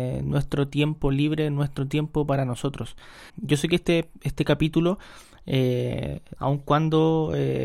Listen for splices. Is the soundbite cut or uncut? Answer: cut